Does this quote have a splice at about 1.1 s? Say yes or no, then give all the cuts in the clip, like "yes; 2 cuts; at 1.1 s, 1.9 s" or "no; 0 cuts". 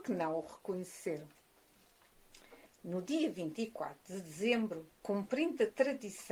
no; 2 cuts; at 2.7 s, 4.9 s